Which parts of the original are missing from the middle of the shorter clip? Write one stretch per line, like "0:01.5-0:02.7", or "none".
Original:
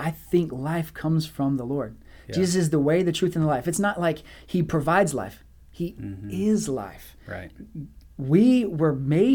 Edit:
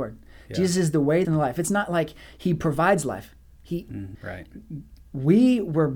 0:03.0-0:03.3
0:06.2-0:07.2